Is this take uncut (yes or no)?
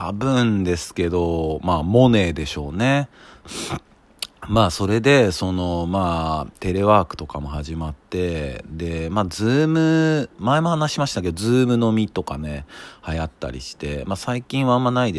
no